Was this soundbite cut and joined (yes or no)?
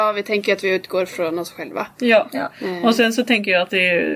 no